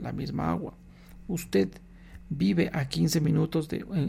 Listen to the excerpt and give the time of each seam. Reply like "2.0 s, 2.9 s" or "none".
none